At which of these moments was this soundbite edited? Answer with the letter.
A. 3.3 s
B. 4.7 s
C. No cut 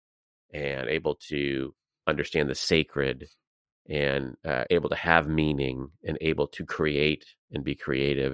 B